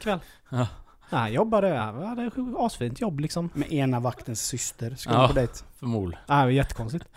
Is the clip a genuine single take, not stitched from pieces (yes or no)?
yes